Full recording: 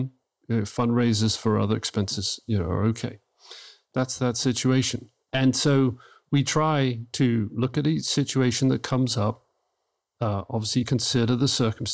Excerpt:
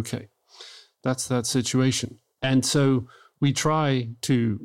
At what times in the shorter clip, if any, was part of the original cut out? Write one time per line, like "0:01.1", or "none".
none